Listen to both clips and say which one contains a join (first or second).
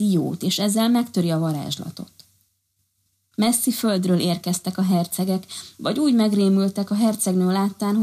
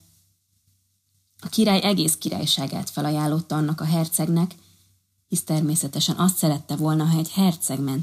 first